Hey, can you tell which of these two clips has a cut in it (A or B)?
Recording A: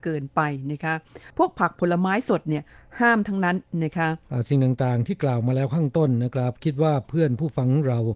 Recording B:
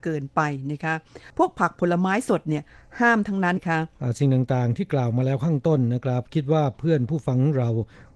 B